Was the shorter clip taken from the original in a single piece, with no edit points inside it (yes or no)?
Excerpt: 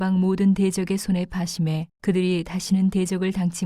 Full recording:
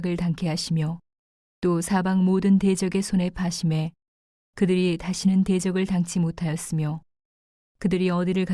no